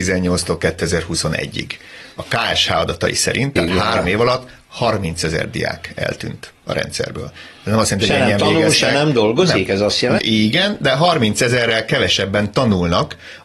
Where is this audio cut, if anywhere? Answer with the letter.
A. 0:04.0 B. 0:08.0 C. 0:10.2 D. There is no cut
C